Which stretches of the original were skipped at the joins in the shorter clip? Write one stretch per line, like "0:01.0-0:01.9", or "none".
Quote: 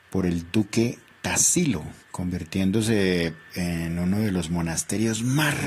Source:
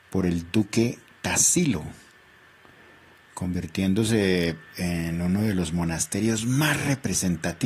0:02.0-0:03.2